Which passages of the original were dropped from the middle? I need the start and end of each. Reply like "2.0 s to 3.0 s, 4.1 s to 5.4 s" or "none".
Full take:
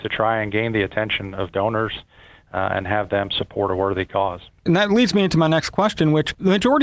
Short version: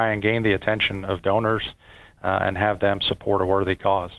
none